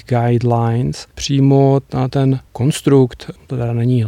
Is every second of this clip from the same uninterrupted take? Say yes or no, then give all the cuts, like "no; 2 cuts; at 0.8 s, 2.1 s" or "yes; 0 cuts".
no; 1 cut; at 1.1 s